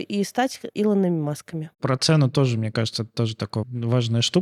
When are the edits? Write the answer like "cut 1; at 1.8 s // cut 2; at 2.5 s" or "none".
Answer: cut 1; at 1.7 s